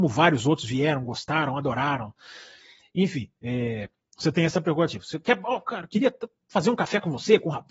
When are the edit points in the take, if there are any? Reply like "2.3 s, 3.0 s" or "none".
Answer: none